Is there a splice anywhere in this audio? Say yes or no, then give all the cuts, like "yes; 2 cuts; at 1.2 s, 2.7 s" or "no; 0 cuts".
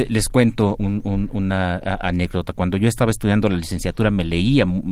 no; 0 cuts